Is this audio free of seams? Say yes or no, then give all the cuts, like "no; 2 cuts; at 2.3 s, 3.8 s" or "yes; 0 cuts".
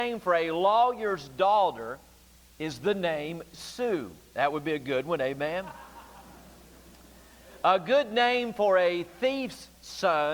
yes; 0 cuts